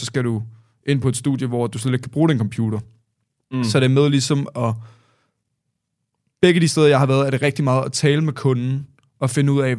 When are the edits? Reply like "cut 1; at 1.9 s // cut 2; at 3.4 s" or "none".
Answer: none